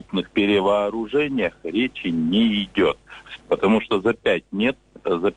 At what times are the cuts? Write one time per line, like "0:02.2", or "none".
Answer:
0:03.4